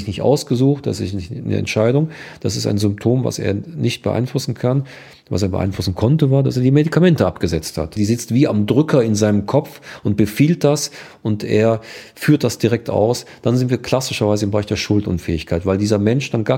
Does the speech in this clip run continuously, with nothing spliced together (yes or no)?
no